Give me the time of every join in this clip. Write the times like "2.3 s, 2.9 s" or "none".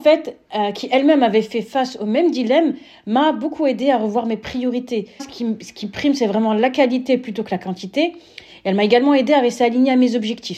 5.2 s